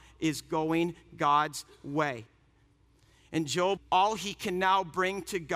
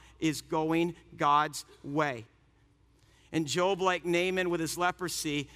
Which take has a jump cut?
first; 1 cut; at 3.8 s

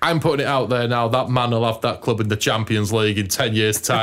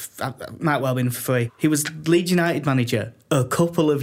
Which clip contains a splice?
second; 1 cut; at 1.5 s

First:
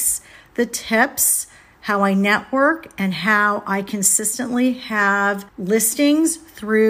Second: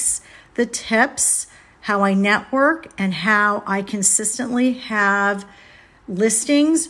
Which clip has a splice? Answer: first; 1 cut; at 5.5 s

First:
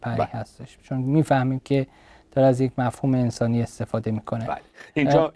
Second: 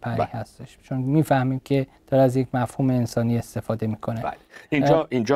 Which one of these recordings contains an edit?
second; 1 cut; at 2.0 s

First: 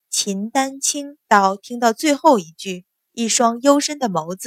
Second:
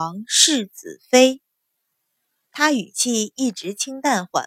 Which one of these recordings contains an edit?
first; 2 cuts; at 1.2 s, 3.1 s

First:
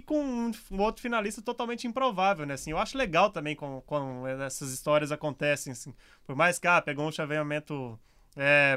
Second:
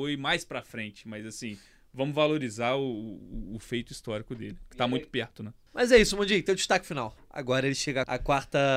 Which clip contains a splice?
second; 2 cuts; at 5.7 s, 7.2 s

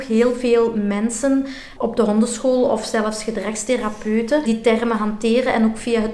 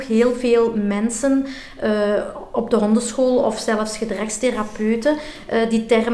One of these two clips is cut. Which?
first; 2 cuts; at 1.8 s, 4.4 s

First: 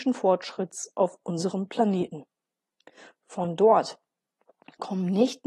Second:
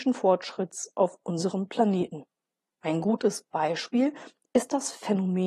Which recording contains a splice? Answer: second; 1 cut; at 2.8 s

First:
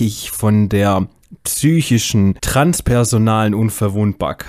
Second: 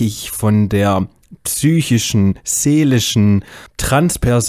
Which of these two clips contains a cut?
first; 1 cut; at 2.4 s

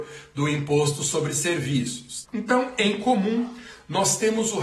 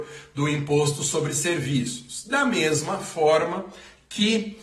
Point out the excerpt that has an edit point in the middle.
first; 1 cut; at 2.2 s

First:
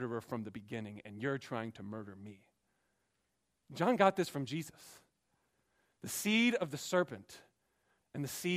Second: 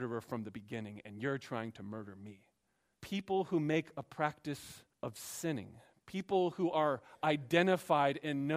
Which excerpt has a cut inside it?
second; 2 cuts; at 2.9 s, 4.9 s

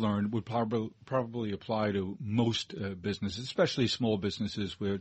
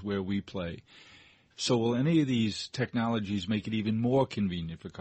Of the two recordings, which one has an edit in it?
second; 1 cut; at 1.5 s

